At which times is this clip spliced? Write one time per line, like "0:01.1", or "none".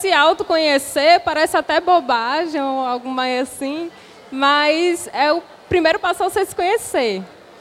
none